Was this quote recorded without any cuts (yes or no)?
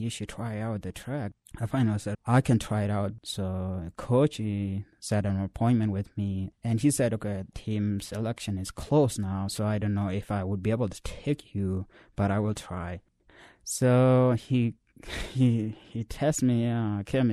no